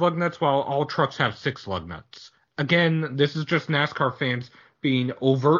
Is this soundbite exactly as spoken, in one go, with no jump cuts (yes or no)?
yes